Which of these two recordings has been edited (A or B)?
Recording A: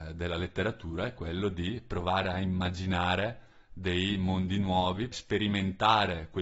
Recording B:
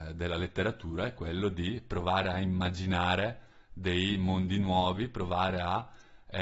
A